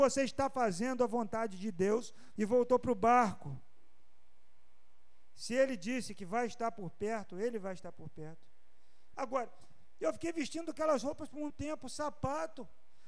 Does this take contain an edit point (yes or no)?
yes